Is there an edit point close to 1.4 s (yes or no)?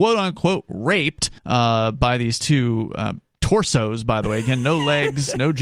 yes